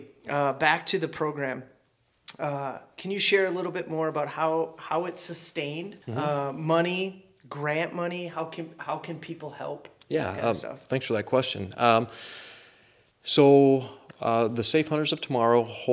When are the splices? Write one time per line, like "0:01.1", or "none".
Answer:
0:06.0